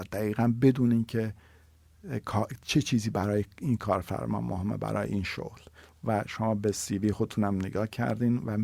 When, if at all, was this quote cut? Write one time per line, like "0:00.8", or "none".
none